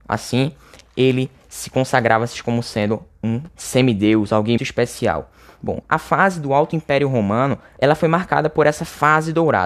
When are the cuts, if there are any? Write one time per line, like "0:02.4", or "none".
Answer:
0:04.6
0:05.8
0:07.8